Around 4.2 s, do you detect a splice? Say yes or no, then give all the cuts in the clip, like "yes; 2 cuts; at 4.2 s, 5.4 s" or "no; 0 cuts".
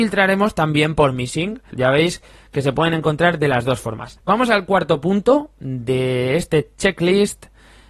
yes; 2 cuts; at 1.7 s, 4.2 s